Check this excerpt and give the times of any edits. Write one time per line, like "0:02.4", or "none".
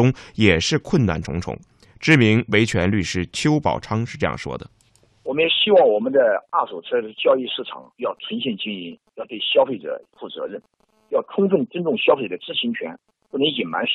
none